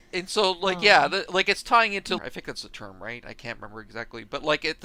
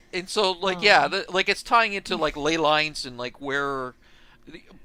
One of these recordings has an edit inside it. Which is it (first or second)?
first